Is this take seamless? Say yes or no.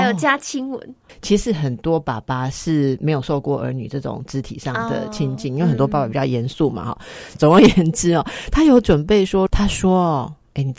no